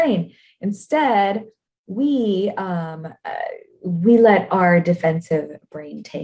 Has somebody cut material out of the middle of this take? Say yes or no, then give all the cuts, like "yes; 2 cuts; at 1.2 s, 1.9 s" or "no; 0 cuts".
no; 0 cuts